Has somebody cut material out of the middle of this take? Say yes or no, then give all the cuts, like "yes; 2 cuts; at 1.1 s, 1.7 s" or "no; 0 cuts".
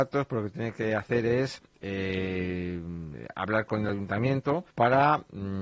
yes; 1 cut; at 4.7 s